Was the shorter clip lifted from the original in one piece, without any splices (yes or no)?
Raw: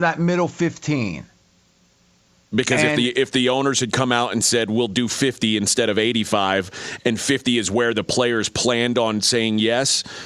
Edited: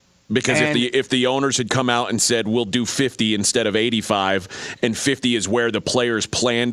yes